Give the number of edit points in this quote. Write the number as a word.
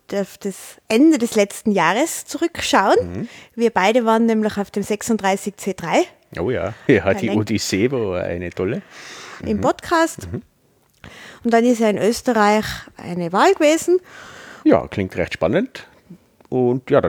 three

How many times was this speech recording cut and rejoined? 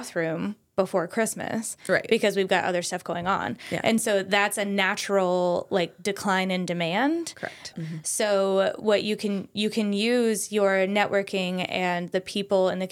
one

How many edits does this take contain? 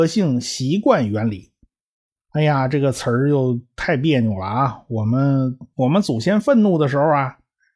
one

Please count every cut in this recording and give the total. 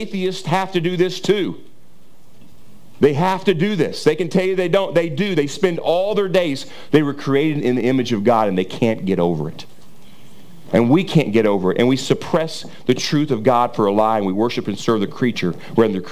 one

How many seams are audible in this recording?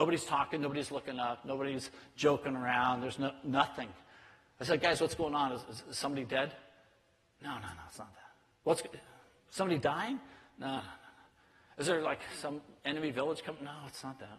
zero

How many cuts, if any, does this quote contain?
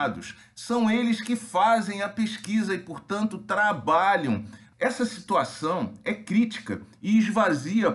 one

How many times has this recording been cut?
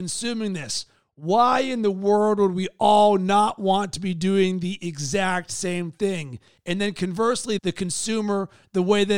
two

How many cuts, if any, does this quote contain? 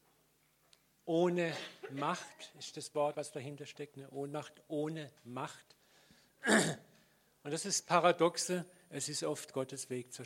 one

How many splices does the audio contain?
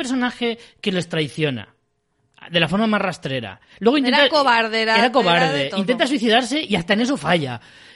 zero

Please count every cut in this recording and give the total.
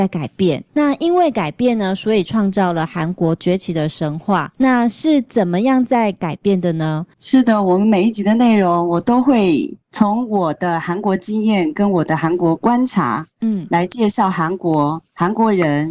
two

